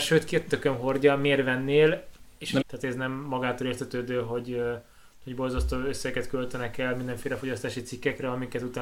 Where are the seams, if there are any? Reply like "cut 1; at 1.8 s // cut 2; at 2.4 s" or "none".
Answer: cut 1; at 2.6 s